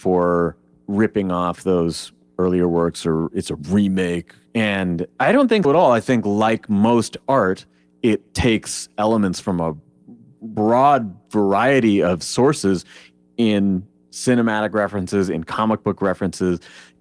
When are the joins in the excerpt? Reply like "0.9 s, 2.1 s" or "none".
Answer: 5.6 s